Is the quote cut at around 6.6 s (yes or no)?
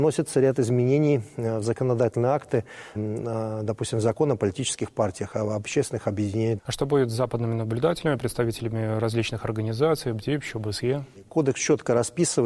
yes